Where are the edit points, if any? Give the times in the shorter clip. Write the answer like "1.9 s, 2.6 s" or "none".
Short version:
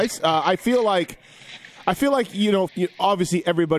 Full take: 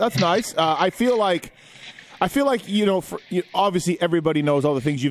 2.7 s